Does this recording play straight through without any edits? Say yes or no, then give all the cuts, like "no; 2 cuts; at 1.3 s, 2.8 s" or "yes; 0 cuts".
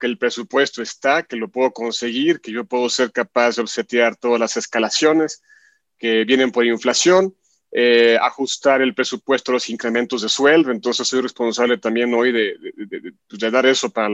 yes; 0 cuts